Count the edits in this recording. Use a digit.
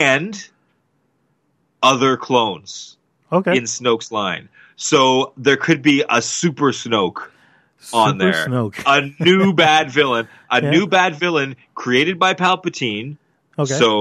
0